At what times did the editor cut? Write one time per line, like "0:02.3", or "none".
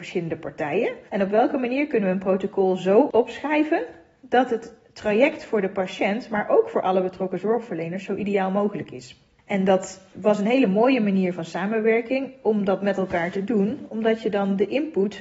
0:01.1